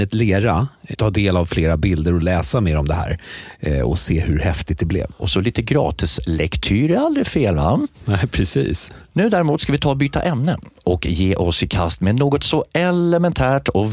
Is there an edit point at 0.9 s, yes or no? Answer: yes